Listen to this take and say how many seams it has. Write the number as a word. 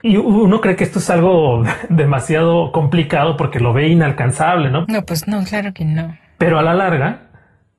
one